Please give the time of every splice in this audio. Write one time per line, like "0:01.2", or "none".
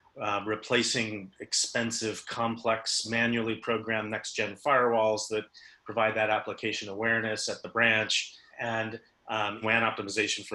0:08.5
0:09.6